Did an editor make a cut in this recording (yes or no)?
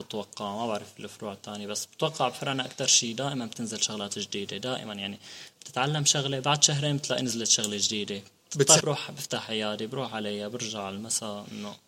yes